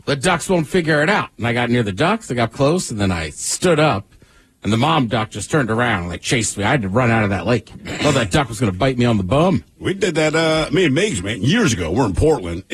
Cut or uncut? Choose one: cut